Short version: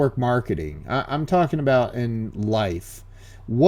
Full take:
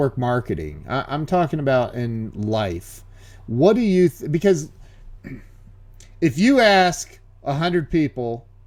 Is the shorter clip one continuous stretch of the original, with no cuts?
yes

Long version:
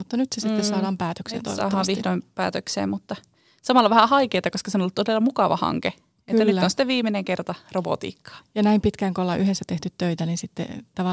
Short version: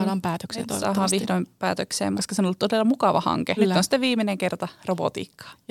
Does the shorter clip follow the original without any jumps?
no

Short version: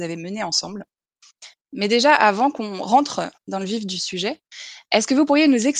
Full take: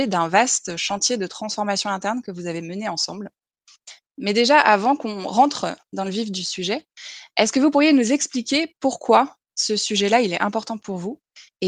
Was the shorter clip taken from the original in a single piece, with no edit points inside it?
yes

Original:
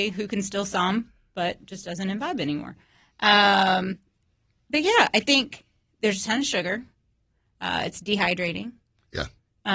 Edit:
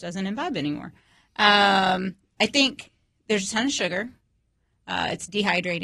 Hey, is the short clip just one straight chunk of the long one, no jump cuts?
no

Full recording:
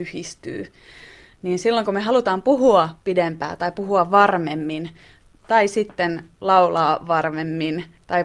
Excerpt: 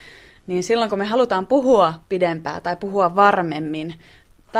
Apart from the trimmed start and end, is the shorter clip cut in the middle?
no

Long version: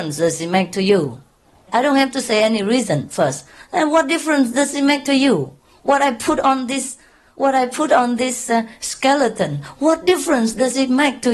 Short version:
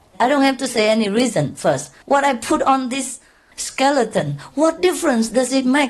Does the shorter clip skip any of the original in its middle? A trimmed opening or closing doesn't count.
yes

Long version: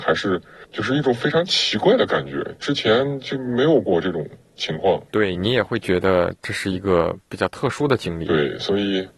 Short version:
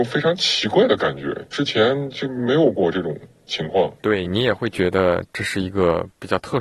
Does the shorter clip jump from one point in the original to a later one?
no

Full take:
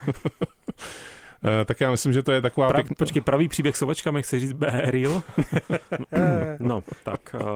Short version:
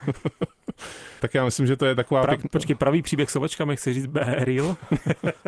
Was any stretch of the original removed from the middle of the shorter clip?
yes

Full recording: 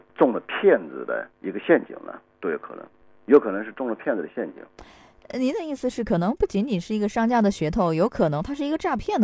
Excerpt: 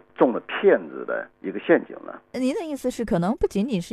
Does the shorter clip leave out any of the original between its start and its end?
yes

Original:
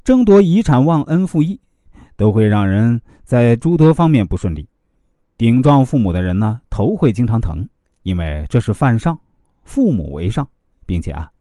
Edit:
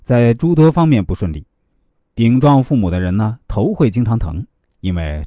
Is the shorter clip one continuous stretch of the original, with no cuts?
yes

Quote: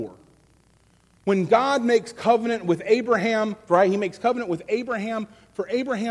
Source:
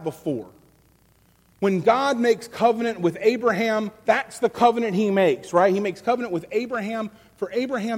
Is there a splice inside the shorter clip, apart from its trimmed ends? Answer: yes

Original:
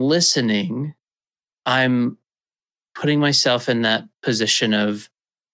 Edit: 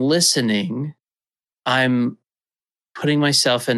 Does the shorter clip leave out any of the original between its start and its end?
no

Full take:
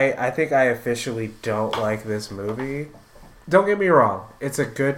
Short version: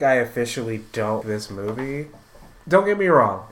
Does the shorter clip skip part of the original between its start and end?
yes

